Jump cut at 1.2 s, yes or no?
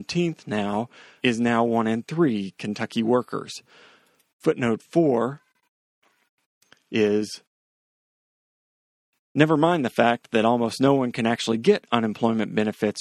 yes